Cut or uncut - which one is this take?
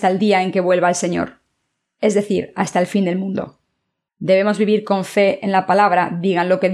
cut